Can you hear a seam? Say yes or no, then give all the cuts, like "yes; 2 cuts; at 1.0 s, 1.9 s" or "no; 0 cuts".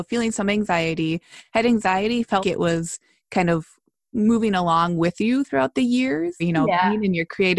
yes; 2 cuts; at 2.4 s, 6.4 s